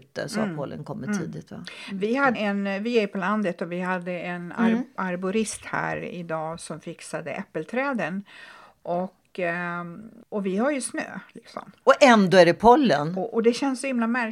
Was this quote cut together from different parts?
yes; 1 cut; at 2.3 s

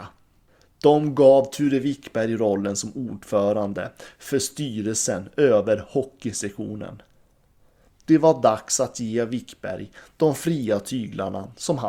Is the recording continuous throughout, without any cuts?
yes; 0 cuts

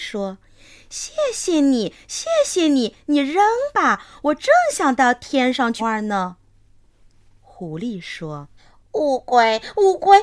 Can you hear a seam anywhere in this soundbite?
yes; 2 cuts; at 5.8 s, 8.6 s

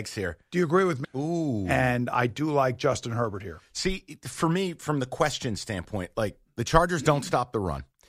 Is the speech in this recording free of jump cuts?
no; 1 cut; at 1.0 s

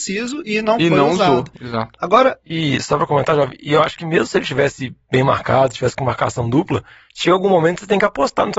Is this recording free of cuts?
yes; 0 cuts

